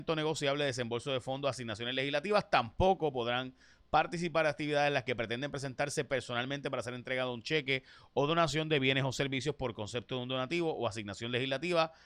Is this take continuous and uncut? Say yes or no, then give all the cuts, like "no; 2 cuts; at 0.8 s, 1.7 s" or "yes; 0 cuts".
yes; 0 cuts